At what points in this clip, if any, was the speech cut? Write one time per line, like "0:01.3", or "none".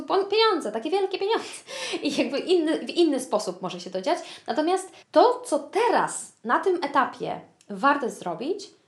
0:05.0